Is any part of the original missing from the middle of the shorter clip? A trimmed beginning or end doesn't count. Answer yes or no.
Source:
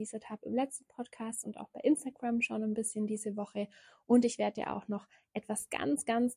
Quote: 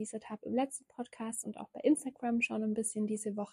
no